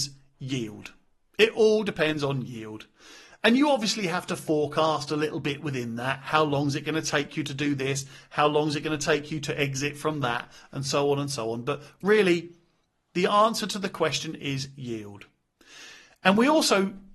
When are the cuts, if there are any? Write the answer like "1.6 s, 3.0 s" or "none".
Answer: none